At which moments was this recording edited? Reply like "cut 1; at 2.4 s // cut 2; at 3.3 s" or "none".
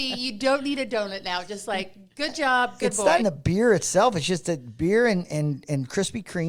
cut 1; at 3.2 s